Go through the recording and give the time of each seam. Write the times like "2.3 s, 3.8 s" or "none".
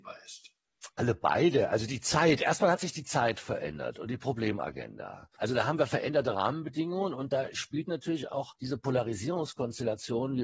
5.4 s